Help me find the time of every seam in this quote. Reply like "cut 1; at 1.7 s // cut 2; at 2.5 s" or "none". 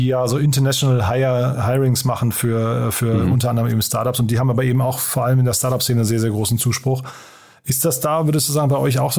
none